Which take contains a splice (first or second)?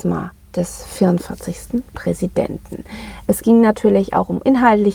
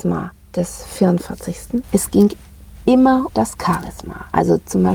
second